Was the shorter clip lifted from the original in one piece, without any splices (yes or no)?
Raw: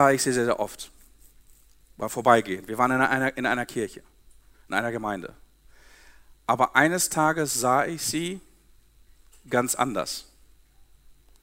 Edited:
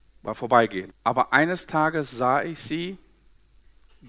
no